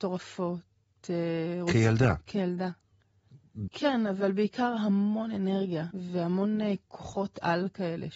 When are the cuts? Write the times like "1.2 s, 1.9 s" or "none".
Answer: 3.7 s, 5.9 s